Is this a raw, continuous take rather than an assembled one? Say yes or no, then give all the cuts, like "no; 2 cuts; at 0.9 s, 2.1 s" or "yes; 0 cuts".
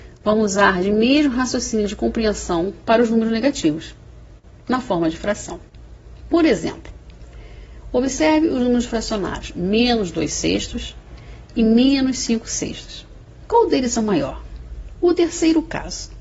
no; 1 cut; at 14.9 s